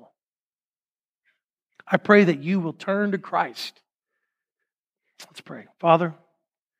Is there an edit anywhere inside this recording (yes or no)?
no